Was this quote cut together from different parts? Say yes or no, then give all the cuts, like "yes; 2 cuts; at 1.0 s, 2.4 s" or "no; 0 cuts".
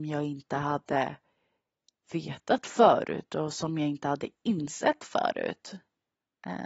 yes; 1 cut; at 2.0 s